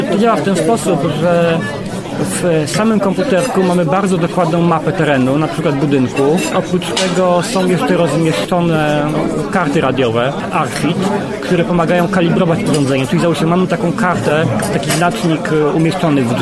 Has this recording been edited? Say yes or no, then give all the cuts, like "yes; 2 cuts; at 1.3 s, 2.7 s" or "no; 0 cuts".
no; 0 cuts